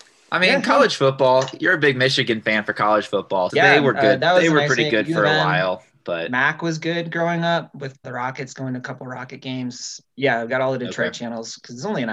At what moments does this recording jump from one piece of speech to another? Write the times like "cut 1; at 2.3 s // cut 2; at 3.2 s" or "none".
cut 1; at 3.5 s // cut 2; at 8.0 s // cut 3; at 10.0 s